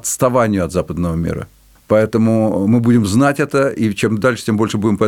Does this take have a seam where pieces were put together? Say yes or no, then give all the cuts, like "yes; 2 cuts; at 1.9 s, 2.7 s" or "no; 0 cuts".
yes; 1 cut; at 1.8 s